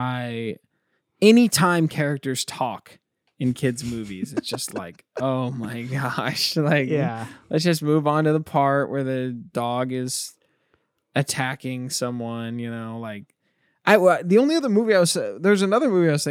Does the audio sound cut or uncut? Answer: uncut